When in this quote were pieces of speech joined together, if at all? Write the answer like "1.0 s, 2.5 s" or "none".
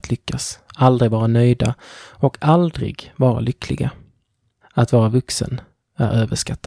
4.6 s